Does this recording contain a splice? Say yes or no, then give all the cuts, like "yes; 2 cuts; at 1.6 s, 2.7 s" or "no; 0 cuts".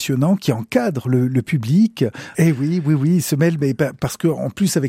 yes; 1 cut; at 2.3 s